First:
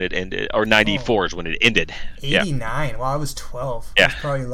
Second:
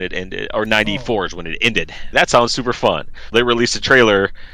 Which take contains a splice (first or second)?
second